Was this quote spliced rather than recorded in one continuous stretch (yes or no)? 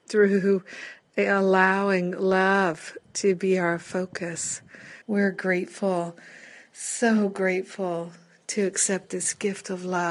yes